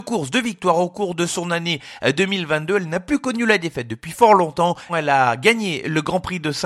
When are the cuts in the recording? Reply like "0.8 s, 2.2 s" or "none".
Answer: 4.9 s